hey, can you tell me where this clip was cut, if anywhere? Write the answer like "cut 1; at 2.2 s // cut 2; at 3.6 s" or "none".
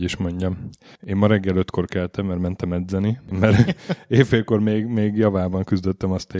cut 1; at 3.3 s